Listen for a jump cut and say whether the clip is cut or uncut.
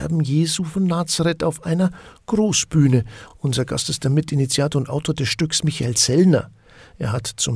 uncut